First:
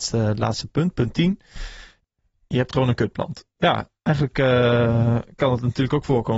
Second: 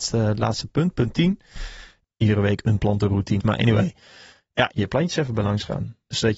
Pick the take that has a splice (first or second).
second